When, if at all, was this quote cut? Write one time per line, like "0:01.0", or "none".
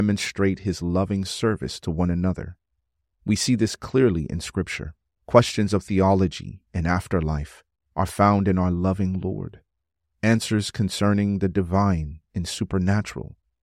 0:03.1
0:05.2